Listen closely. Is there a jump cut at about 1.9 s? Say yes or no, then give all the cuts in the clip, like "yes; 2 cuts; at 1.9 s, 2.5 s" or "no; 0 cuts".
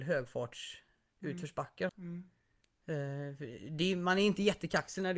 yes; 1 cut; at 1.9 s